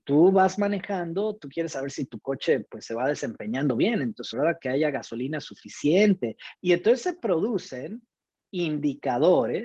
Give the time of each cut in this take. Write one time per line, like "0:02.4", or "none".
0:04.3
0:06.5